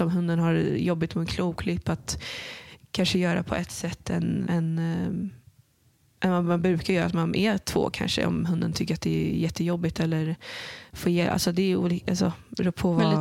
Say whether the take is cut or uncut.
cut